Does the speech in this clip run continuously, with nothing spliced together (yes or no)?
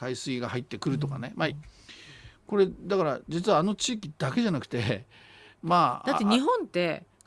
no